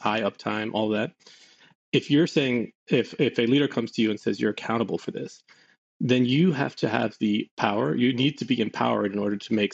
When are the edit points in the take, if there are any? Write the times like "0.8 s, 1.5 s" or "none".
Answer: none